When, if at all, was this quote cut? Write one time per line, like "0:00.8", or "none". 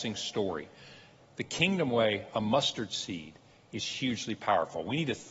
0:01.2